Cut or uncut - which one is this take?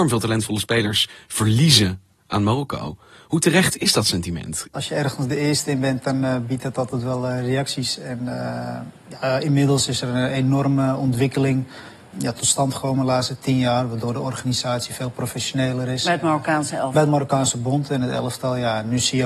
cut